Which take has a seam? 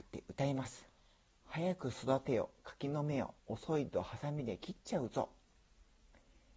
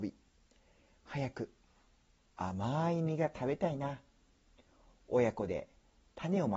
first; 2 cuts; at 0.9 s, 3.4 s

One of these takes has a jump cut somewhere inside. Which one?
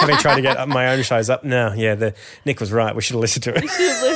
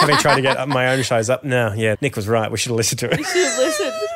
second; 1 cut; at 1.9 s

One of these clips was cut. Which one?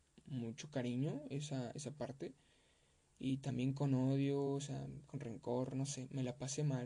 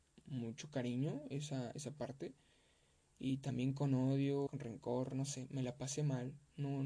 second; 1 cut; at 4.5 s

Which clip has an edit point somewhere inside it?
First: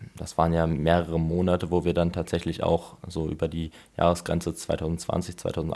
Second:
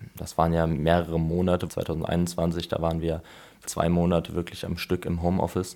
second; 2 cuts; at 1.7 s, 3.7 s

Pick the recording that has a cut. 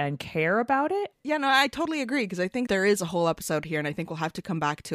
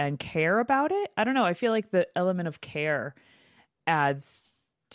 first; 2 cuts; at 1.1 s, 2.7 s

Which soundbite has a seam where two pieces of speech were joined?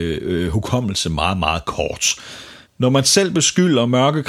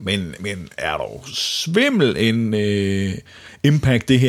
first; 1 cut; at 2.7 s

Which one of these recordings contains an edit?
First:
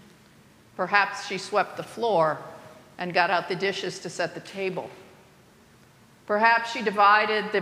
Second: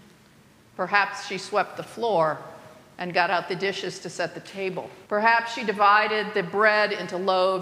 second; 1 cut; at 5.1 s

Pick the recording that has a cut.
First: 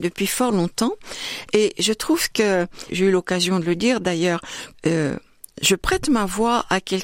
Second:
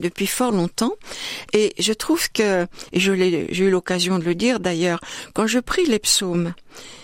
first; 2 cuts; at 2.9 s, 4.7 s

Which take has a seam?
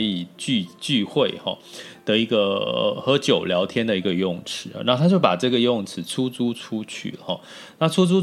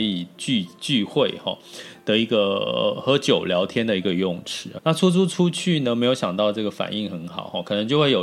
second; 1 cut; at 4.8 s

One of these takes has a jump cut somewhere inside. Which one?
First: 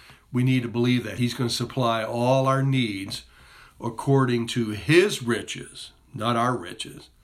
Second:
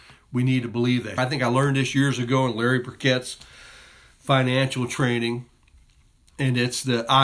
second; 1 cut; at 1.2 s

